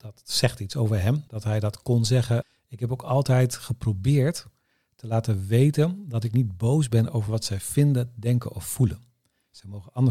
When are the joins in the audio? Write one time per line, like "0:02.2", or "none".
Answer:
0:01.3